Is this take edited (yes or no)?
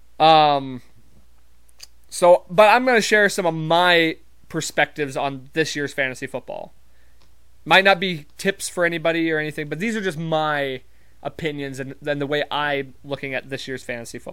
no